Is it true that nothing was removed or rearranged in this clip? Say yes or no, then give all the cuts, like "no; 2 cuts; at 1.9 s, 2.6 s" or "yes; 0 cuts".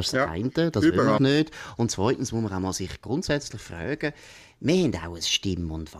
no; 1 cut; at 1.2 s